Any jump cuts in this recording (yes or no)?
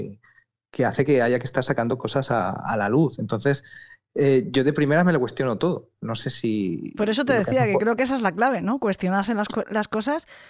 no